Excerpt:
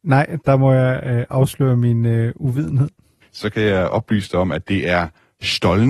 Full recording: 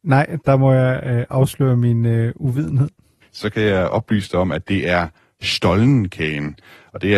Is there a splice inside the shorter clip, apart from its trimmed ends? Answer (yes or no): no